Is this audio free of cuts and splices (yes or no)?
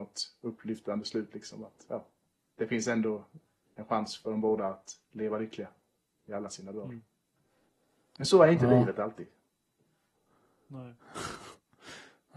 yes